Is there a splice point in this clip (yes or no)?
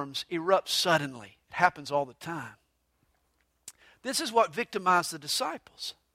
no